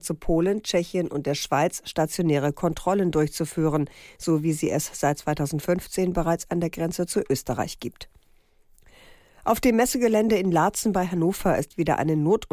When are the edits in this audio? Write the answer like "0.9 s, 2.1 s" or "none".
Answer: none

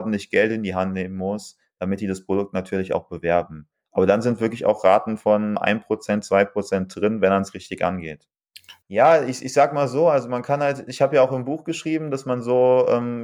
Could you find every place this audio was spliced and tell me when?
5.5 s, 8.8 s

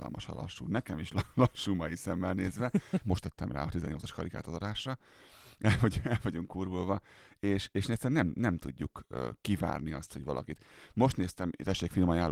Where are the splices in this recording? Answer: 3.0 s

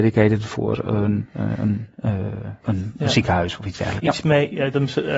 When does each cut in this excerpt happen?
2.6 s, 4.0 s

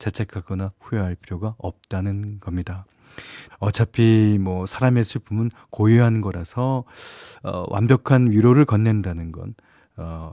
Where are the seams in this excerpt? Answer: 3.5 s

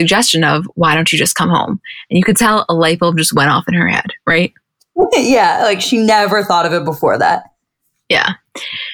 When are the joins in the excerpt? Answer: none

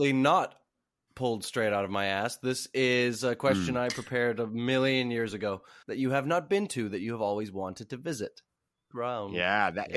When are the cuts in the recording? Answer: 5.8 s, 8.9 s

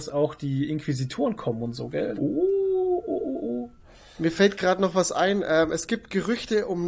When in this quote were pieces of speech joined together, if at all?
2.2 s

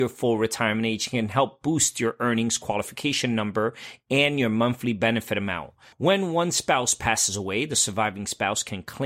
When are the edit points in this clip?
5.9 s

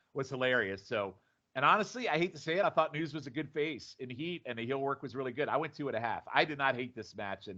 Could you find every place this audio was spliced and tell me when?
none

